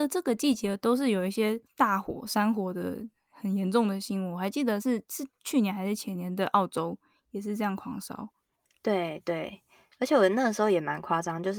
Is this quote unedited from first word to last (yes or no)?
yes